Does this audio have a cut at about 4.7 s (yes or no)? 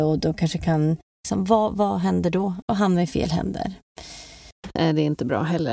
no